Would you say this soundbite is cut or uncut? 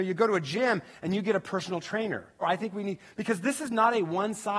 cut